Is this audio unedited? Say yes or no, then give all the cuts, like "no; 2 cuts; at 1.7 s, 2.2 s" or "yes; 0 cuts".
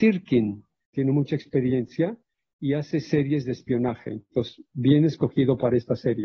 no; 1 cut; at 0.9 s